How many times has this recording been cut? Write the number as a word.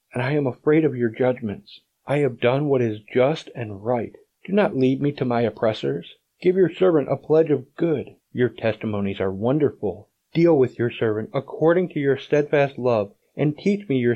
two